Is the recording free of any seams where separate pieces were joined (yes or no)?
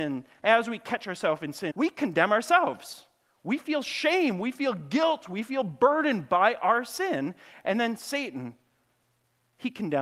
no